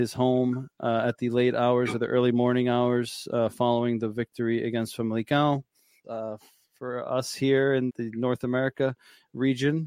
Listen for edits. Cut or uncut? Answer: cut